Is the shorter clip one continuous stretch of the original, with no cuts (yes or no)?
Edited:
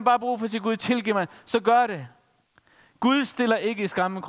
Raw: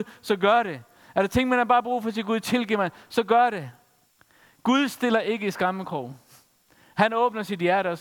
yes